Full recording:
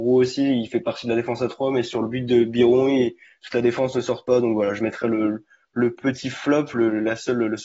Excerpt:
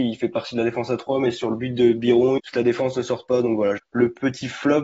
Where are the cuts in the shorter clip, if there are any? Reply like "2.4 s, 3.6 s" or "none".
2.4 s, 3.8 s

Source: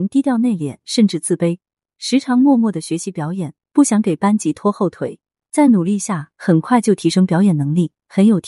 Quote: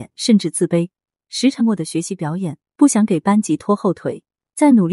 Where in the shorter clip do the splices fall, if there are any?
1.6 s

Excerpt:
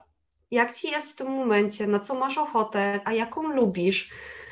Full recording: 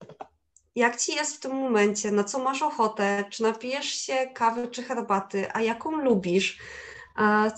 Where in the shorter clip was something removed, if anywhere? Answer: 3.0 s

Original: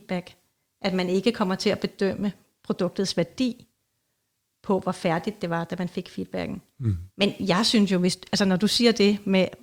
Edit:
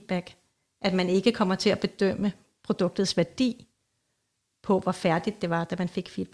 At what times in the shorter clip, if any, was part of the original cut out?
none

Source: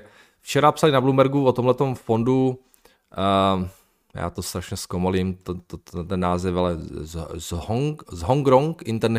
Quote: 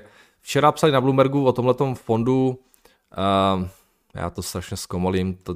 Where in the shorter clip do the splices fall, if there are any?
none

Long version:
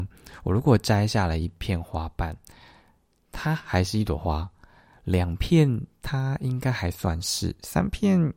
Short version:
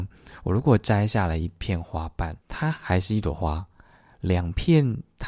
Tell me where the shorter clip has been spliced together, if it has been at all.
2.4 s

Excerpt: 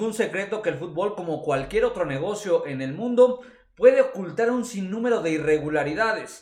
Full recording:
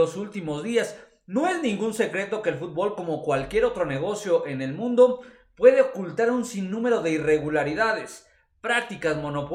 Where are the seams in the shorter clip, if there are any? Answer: none

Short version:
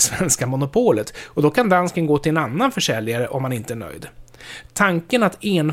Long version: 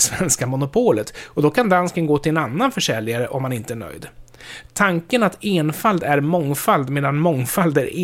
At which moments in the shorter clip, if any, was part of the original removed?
none

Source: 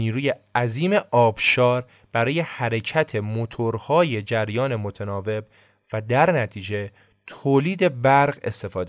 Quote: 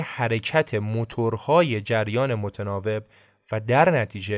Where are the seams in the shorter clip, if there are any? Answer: none

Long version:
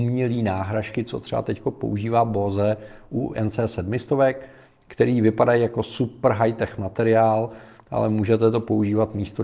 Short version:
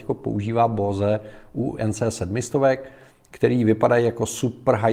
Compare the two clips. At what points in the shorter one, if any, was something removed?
none

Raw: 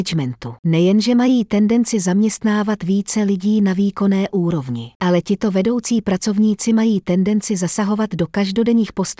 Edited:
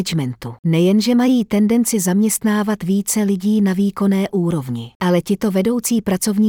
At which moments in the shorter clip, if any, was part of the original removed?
none

